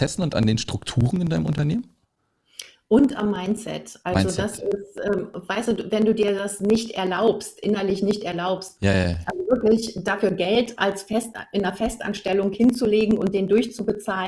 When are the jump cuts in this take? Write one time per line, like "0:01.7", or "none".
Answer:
0:08.8